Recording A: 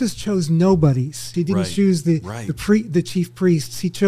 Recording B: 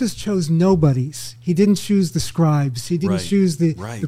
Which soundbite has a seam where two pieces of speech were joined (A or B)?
A